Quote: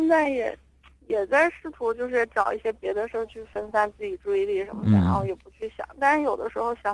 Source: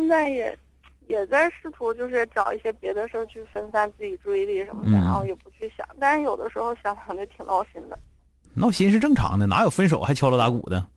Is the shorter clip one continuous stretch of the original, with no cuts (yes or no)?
yes